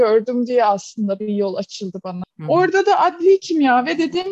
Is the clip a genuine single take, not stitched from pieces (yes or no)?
no